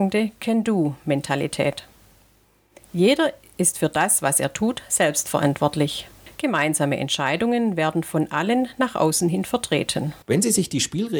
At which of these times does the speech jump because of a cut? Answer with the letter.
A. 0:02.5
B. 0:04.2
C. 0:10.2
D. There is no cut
C